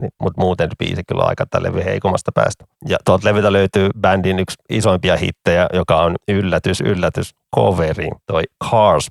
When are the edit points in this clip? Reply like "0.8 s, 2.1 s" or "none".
none